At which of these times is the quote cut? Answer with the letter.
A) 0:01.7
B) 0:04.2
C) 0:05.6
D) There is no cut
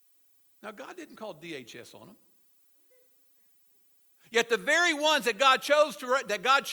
B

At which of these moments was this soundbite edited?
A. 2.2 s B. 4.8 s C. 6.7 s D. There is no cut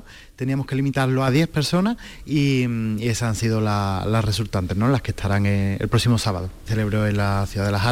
C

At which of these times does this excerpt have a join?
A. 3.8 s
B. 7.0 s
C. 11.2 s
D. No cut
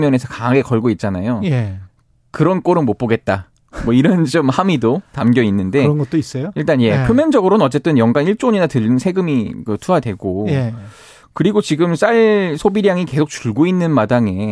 D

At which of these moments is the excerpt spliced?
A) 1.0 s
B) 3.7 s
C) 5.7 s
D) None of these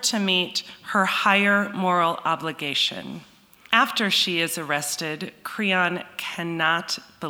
B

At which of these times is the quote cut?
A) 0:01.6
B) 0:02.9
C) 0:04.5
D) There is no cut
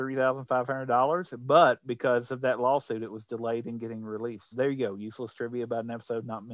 C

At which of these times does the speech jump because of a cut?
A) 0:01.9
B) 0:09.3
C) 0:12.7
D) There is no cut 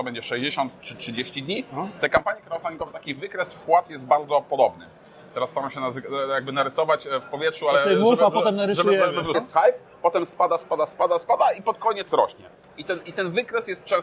B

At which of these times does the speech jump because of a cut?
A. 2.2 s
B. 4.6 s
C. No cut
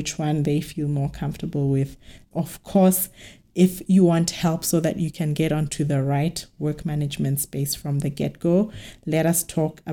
A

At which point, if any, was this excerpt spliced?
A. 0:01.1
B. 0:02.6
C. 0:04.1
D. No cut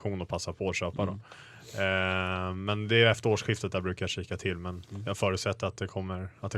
D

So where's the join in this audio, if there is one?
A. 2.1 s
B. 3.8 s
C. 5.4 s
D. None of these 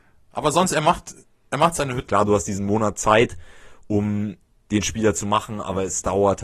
A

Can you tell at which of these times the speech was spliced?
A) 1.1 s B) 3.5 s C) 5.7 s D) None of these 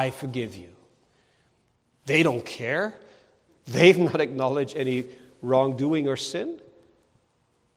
B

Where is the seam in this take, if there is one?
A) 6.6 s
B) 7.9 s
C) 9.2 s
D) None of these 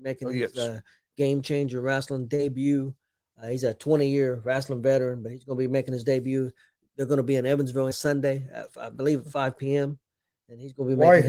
B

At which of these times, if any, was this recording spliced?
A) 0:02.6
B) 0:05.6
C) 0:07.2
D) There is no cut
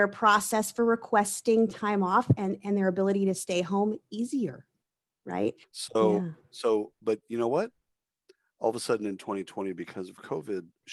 B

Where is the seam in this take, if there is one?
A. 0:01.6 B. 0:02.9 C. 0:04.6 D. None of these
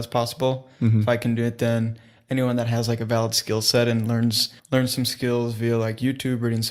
C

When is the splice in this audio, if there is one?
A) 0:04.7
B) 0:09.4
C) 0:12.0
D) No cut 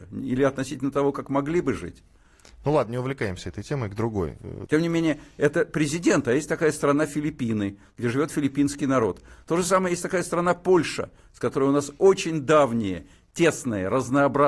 A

